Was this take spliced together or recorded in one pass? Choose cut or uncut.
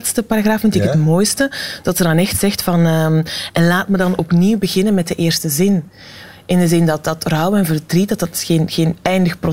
uncut